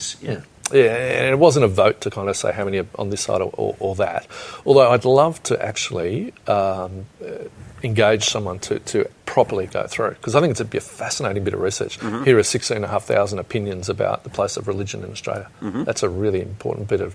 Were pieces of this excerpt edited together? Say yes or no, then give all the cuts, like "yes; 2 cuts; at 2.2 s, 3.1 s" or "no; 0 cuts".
yes; 1 cut; at 9.2 s